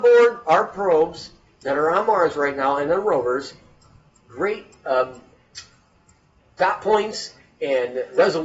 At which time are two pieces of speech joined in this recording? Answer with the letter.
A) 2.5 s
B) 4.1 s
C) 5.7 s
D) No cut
B